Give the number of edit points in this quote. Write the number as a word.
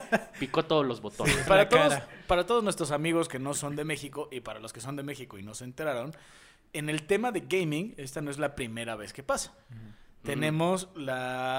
one